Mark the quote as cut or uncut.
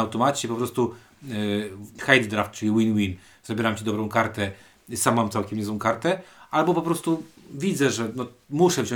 cut